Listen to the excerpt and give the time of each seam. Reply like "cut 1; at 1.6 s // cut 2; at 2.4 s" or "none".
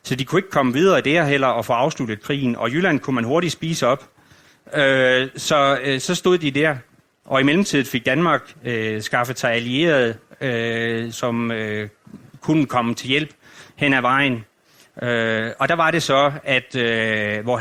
cut 1; at 11.1 s